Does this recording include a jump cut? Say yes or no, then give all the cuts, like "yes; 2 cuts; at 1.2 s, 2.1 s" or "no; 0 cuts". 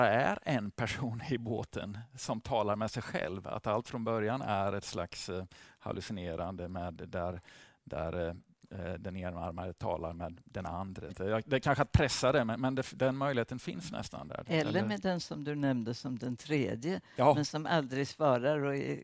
yes; 1 cut; at 11.1 s